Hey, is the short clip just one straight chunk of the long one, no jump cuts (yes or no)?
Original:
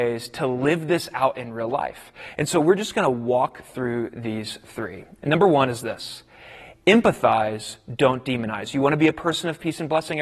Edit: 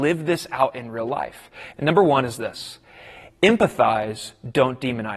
no